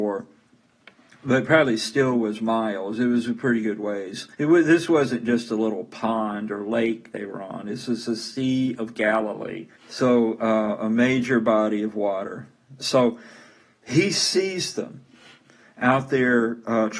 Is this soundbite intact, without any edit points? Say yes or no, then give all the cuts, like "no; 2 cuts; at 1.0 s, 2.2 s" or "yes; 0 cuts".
no; 3 cuts; at 4.3 s, 9.8 s, 12.8 s